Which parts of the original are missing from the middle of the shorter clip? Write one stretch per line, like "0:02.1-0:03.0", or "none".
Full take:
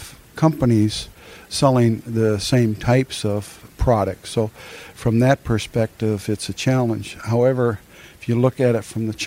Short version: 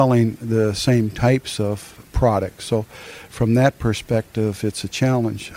none